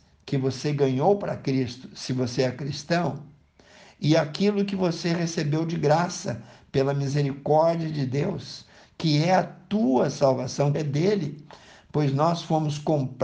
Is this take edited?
yes; 1 cut; at 10.7 s

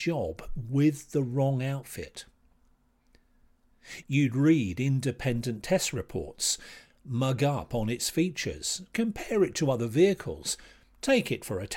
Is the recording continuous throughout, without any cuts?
no; 1 cut; at 4.0 s

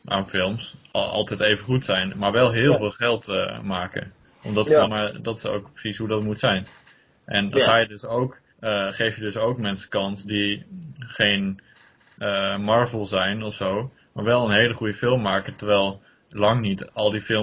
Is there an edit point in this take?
yes; 2 cuts; at 4.8 s, 8.5 s

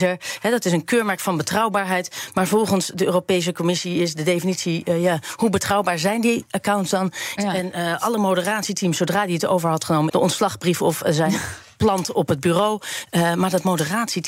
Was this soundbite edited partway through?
yes; 2 cuts; at 7.4 s, 10.1 s

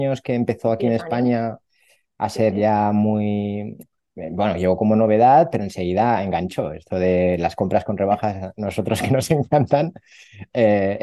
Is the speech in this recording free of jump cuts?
yes; 0 cuts

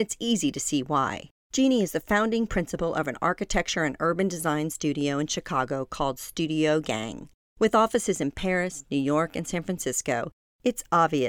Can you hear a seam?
no; 0 cuts

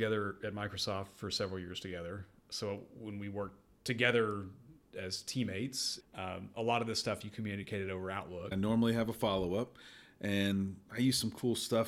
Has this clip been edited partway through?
yes; 2 cuts; at 6.0 s, 8.5 s

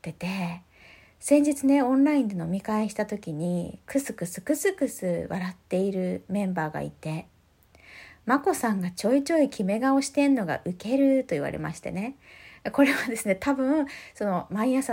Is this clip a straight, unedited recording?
yes; 0 cuts

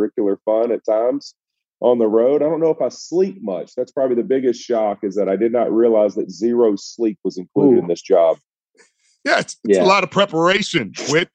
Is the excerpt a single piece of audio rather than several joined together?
yes; 0 cuts

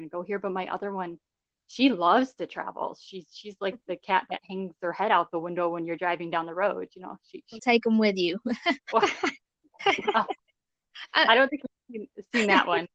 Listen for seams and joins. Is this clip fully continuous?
no; 2 cuts; at 7.6 s, 8.8 s

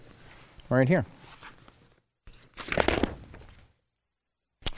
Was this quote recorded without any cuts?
yes; 0 cuts

